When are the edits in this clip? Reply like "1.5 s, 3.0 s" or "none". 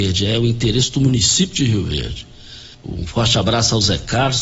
2.7 s